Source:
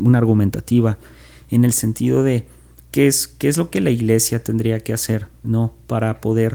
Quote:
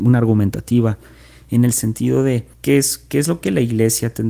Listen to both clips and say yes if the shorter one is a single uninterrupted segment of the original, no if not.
no